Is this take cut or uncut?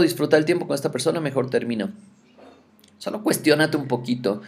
uncut